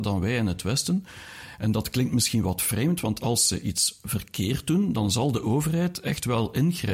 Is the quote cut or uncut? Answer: uncut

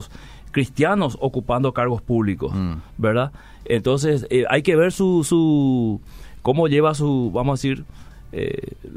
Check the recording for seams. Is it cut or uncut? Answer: uncut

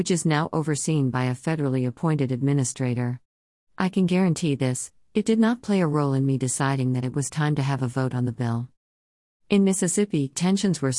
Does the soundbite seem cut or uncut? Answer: cut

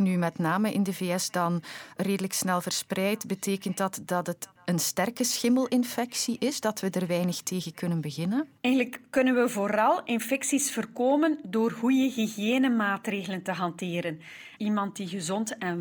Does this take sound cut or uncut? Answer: cut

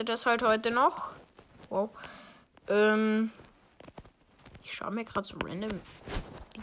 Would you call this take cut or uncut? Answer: uncut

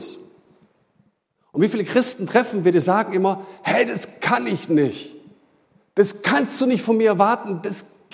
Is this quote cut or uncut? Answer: uncut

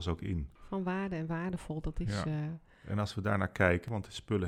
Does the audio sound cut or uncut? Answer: uncut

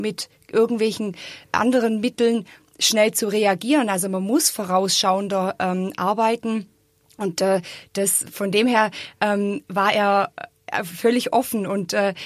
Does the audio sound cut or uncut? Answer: uncut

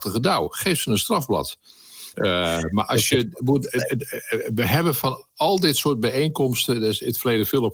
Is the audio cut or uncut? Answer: cut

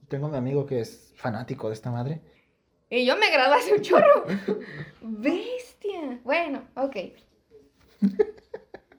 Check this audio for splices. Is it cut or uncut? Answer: cut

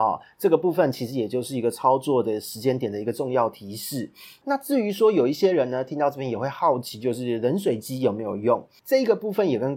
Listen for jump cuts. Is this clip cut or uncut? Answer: uncut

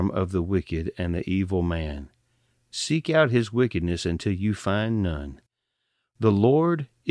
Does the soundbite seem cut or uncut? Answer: uncut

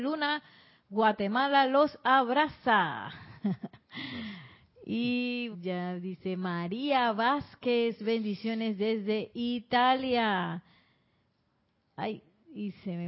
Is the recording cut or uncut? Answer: cut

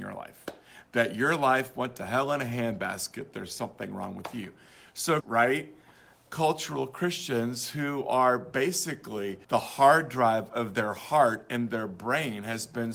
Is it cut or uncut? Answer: cut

